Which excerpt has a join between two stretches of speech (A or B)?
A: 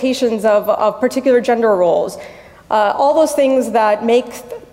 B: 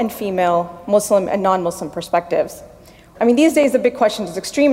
B